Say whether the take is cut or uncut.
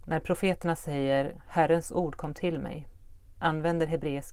uncut